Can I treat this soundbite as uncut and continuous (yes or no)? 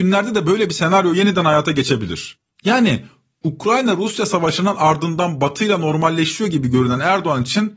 no